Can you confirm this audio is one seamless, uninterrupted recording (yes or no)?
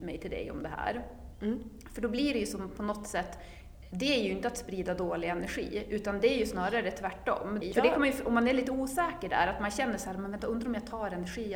no